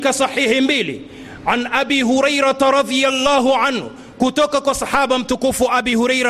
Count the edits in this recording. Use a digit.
0